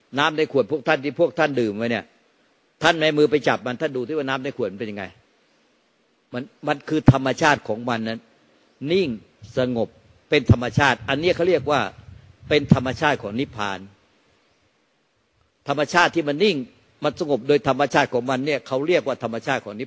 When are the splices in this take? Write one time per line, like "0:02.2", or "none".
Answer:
none

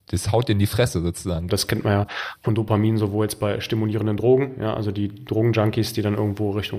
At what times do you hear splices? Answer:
0:01.5

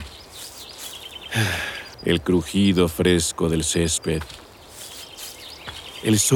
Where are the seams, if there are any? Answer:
0:01.9

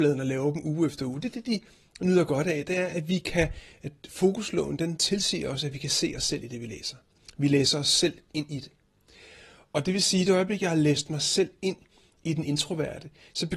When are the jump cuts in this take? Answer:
none

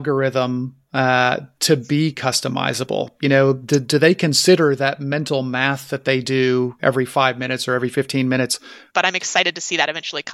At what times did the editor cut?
0:06.8
0:08.9

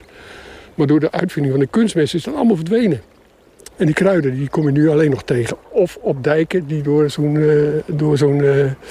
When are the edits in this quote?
0:03.7
0:05.6

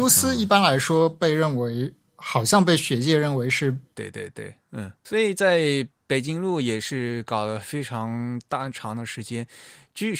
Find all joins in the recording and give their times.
0:03.9

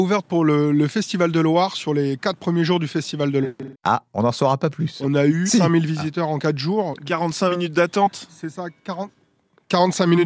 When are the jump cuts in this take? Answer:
0:03.8

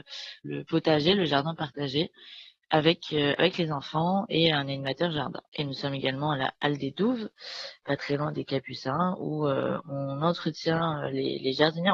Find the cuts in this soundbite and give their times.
none

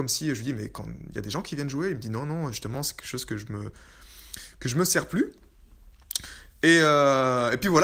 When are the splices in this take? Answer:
none

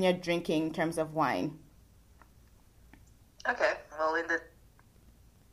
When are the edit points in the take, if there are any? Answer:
0:03.9

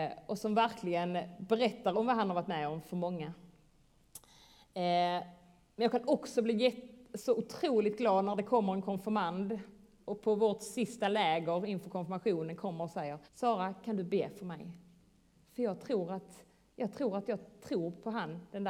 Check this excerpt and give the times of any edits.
0:13.3

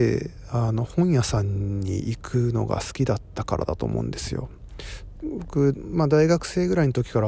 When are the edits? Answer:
0:05.2

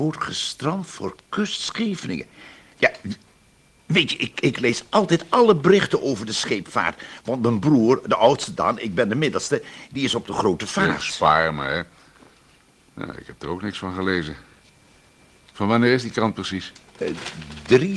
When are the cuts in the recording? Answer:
none

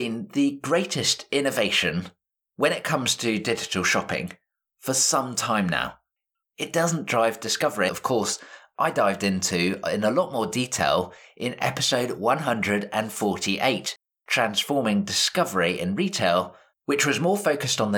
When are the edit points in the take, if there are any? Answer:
0:06.5
0:07.9
0:16.7

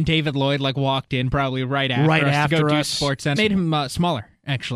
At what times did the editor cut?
0:03.4

